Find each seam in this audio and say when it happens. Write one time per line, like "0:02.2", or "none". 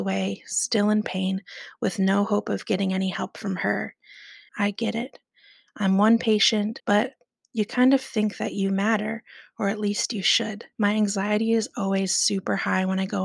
0:04.5
0:06.8
0:10.7

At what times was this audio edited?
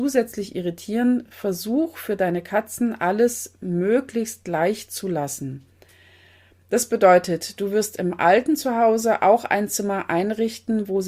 none

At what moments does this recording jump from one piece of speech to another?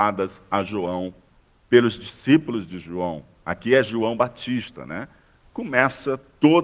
0:05.4

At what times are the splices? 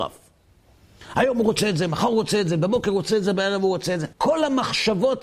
0:04.1

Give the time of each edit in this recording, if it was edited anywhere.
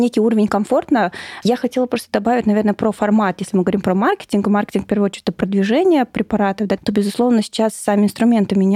0:01.4
0:06.8

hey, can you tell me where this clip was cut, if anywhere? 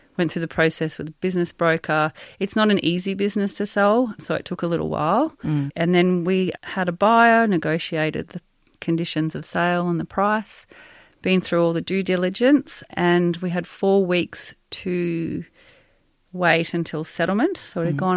none

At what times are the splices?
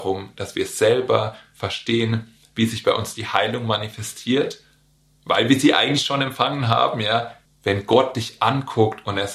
0:07.5

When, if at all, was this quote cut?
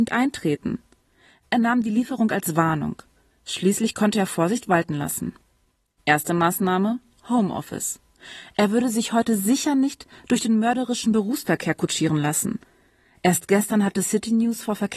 none

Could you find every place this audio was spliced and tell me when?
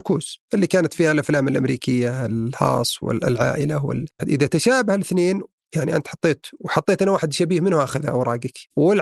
0:04.2

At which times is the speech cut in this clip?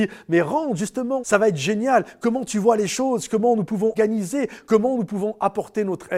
0:01.2
0:03.9

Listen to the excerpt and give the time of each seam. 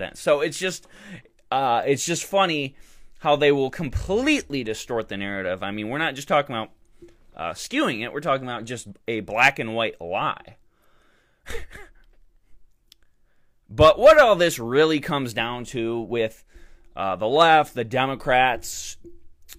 none

